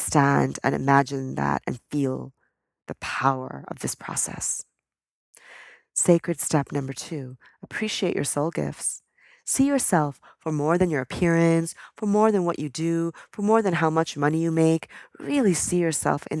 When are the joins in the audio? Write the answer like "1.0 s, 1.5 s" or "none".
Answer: none